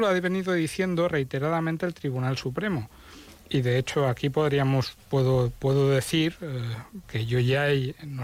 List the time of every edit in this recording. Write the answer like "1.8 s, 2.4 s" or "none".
7.0 s